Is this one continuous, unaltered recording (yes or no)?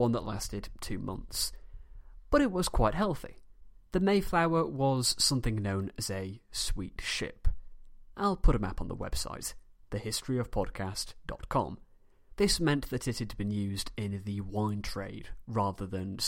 no